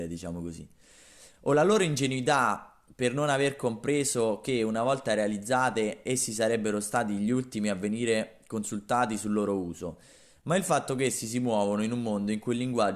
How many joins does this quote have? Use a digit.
0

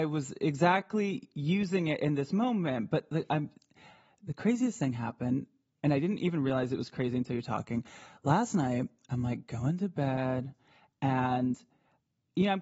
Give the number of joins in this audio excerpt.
0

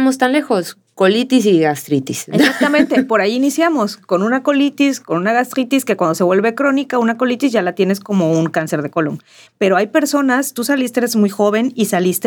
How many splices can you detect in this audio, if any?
1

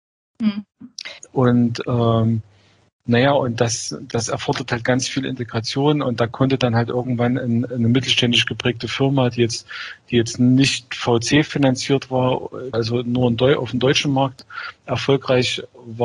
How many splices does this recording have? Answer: 2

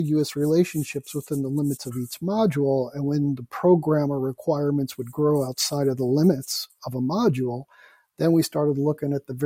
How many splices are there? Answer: 0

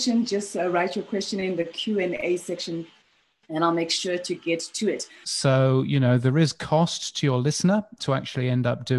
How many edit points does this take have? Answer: 2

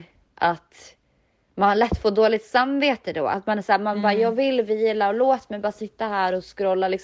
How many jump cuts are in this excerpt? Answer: 0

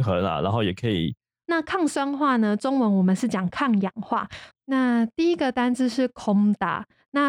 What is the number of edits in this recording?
2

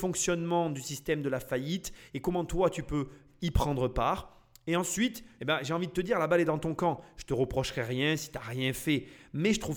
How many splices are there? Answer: 1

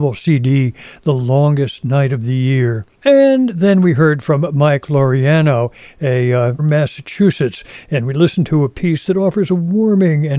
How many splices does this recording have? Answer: 2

